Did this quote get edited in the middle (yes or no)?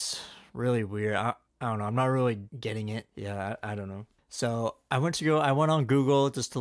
no